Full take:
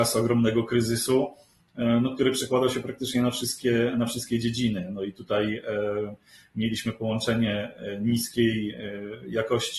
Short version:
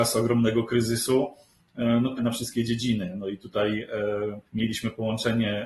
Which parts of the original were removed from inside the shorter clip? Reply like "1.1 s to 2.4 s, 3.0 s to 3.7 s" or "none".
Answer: 2.2 s to 3.9 s, 6.2 s to 6.5 s

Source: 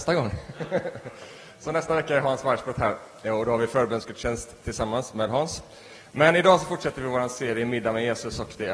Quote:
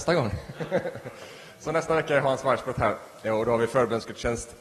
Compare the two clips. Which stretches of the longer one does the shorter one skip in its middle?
none

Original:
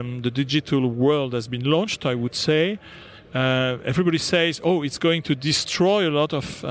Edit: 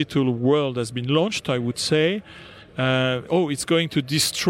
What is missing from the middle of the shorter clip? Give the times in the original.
3.8 s to 4.6 s

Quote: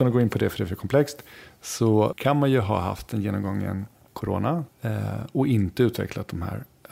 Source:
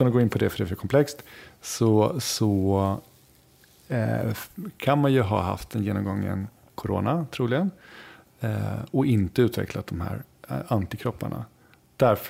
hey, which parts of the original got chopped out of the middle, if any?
2.1 s to 4.7 s, 7.3 s to 8.3 s

